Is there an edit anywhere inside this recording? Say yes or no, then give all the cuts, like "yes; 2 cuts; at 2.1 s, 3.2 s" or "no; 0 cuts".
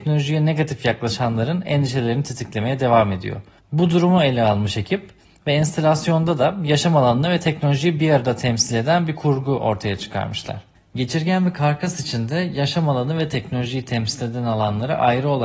no; 0 cuts